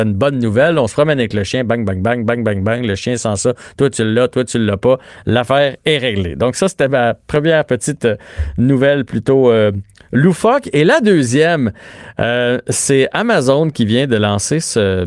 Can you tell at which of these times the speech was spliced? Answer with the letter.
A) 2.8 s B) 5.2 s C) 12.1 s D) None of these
D